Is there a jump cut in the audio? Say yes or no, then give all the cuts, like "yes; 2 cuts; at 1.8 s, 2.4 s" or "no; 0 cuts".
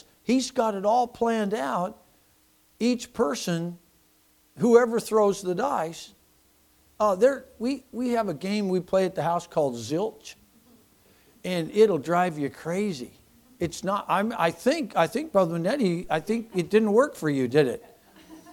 no; 0 cuts